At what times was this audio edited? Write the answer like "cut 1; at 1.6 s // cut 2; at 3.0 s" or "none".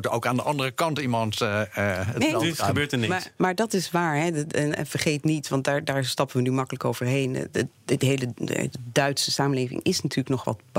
none